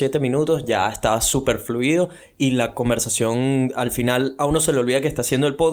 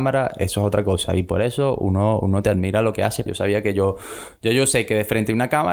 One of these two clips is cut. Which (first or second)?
second